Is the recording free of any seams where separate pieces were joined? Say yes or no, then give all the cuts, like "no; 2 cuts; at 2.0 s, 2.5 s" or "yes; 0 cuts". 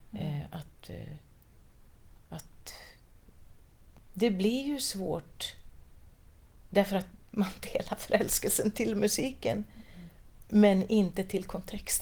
yes; 0 cuts